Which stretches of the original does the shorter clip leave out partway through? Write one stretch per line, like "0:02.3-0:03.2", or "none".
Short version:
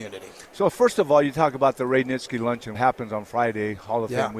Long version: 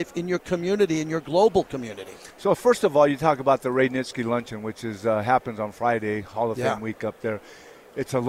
0:04.6-0:05.2